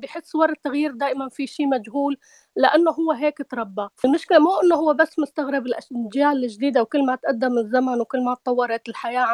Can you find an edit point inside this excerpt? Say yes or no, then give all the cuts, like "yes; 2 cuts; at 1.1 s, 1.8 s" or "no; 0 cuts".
yes; 1 cut; at 3.9 s